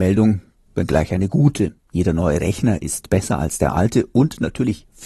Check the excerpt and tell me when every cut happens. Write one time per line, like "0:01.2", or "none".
none